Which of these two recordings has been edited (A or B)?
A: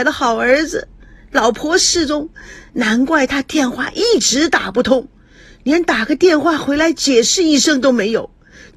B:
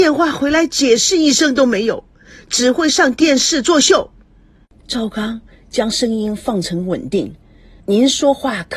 B